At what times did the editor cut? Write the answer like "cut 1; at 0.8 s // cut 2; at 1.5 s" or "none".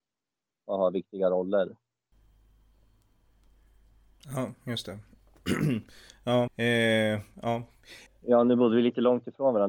cut 1; at 6.5 s // cut 2; at 8.1 s